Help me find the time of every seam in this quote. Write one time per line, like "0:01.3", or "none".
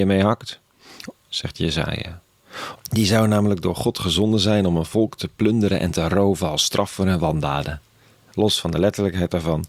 0:02.8

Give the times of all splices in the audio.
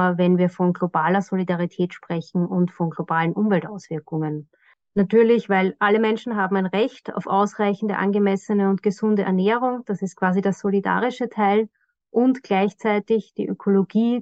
none

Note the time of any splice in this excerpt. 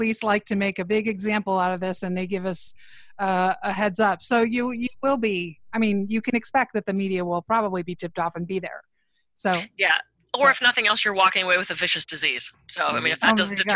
none

